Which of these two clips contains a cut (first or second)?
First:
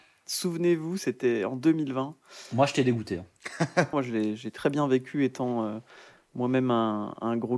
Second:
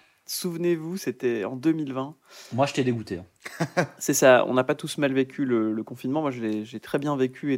first